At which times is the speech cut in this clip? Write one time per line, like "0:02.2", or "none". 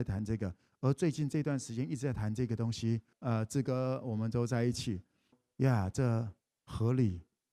0:03.1
0:05.3